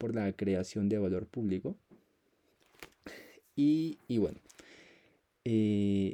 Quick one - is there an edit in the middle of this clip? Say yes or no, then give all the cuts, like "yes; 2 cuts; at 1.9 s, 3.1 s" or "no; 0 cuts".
no; 0 cuts